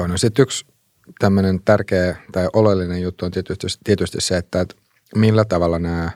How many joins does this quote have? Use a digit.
0